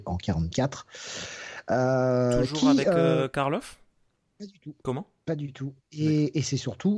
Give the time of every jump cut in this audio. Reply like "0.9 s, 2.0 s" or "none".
4.8 s